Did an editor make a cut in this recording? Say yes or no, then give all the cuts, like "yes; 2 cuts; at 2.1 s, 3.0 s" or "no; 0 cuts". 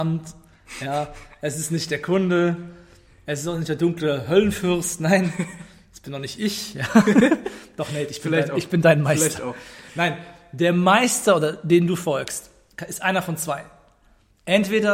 no; 0 cuts